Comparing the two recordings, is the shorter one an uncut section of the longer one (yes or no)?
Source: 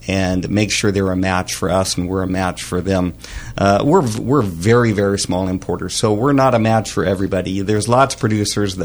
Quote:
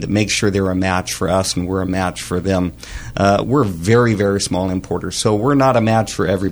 no